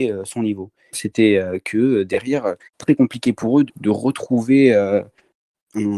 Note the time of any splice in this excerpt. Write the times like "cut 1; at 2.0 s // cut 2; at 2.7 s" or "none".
cut 1; at 0.9 s // cut 2; at 2.6 s // cut 3; at 3.7 s